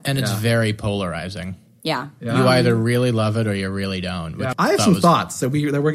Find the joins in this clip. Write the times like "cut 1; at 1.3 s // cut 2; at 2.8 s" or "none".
cut 1; at 4.5 s